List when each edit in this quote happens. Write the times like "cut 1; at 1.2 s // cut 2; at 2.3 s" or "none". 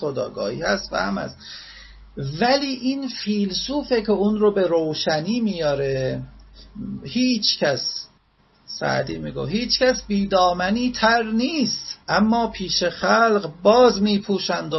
cut 1; at 12.0 s